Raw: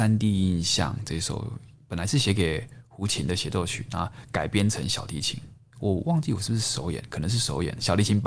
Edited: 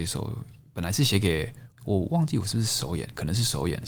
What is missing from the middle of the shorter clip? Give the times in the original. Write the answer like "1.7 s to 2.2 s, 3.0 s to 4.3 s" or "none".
2.9 s to 5.7 s

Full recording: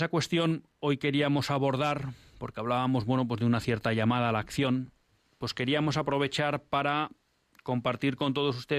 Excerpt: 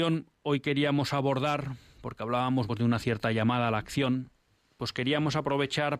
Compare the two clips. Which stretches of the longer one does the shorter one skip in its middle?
3.0 s to 3.3 s

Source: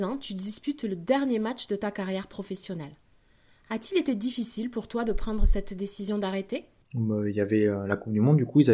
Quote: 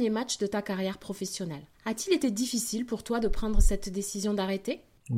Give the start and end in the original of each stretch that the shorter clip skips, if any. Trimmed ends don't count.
3.0 s to 3.6 s

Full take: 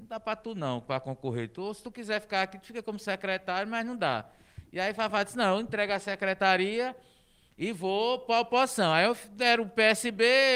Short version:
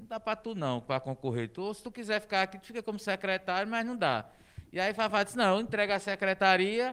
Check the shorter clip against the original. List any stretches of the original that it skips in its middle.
none

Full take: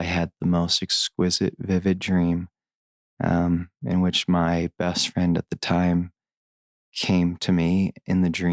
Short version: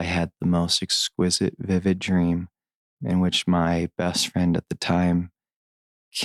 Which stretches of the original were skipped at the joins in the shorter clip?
3.0 s to 3.8 s

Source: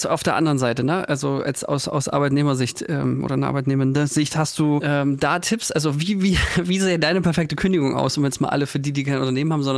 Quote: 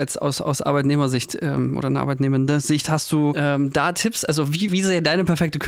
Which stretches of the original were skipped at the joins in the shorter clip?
6.1 s to 6.6 s

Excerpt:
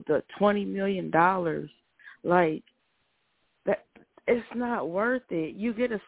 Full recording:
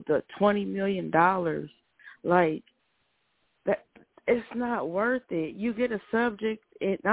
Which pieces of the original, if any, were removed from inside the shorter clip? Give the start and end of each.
none

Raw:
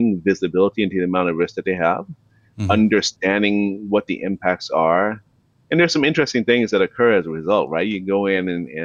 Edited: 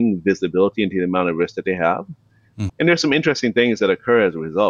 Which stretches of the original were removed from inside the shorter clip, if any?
2.7 s to 5.6 s

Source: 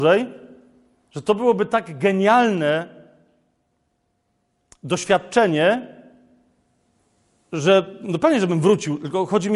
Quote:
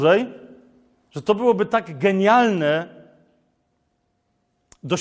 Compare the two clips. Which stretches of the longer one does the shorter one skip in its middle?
none

